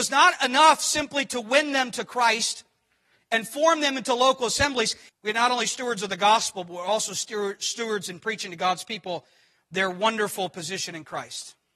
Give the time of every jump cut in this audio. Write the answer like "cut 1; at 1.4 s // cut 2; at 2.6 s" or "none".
cut 1; at 5.1 s

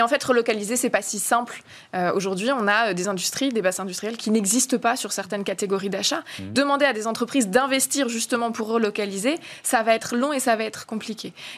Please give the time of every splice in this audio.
cut 1; at 6.5 s

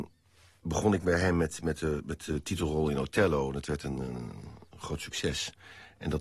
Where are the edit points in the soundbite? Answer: none

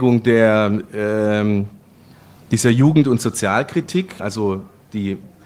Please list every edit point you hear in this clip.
cut 1; at 4.2 s

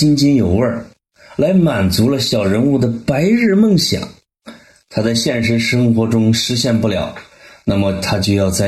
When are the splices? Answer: none

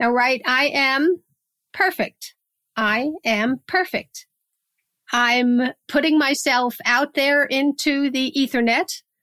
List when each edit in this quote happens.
cut 1; at 1.7 s // cut 2; at 5.0 s

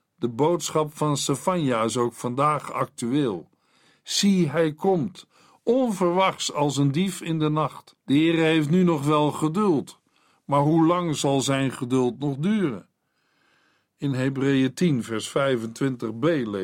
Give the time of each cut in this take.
cut 1; at 8.0 s

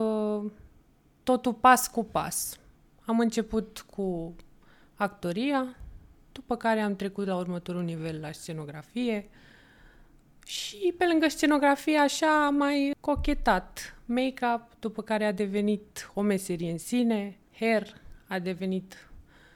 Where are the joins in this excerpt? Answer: cut 1; at 12.9 s // cut 2; at 17.5 s

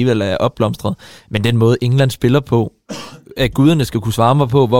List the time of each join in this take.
none

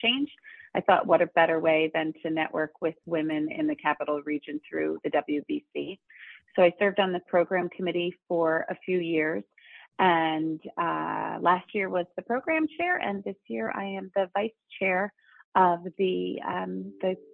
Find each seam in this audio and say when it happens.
none

